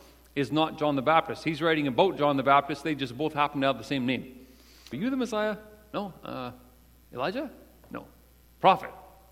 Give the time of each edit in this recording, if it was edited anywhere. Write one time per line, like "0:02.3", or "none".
0:04.9